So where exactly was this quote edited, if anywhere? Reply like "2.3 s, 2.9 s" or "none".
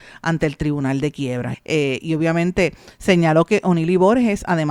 1.5 s